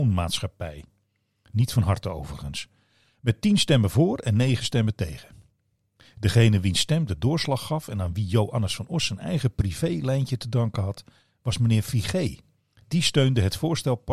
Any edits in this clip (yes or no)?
no